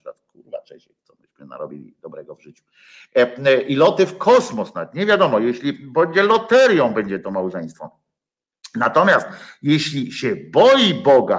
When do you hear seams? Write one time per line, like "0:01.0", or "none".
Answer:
none